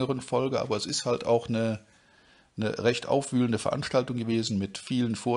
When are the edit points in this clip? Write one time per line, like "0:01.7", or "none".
none